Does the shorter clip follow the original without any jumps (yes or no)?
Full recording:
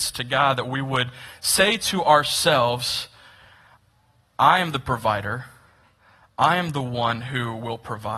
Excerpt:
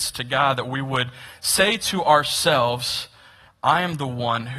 no